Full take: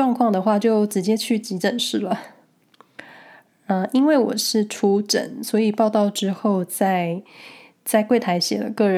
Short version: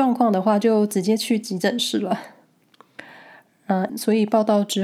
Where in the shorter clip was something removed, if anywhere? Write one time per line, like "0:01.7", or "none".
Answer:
0:03.9